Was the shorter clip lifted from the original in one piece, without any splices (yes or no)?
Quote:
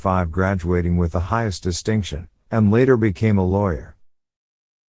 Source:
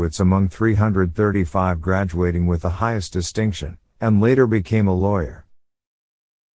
yes